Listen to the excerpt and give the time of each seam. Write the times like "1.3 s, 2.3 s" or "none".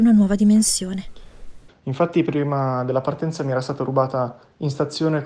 1.7 s